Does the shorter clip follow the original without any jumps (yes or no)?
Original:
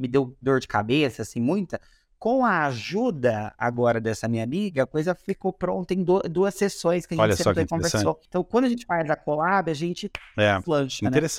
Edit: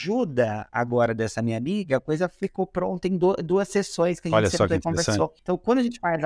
yes